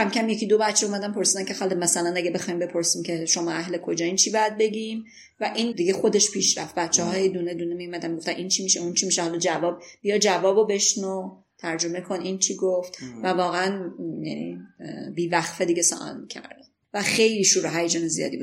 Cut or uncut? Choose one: cut